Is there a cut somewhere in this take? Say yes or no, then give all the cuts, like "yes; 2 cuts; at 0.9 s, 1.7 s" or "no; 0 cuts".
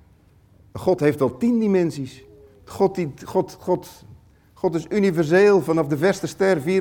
no; 0 cuts